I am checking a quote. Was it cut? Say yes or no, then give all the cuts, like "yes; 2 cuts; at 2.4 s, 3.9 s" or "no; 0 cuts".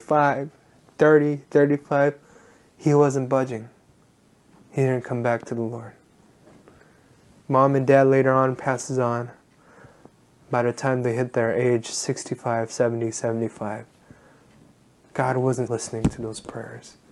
yes; 1 cut; at 15.7 s